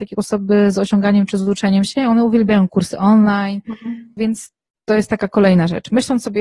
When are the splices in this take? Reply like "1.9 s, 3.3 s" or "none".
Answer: 4.2 s